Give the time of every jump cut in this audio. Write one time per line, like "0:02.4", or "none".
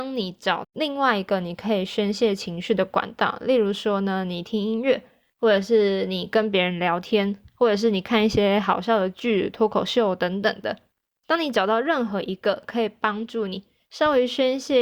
none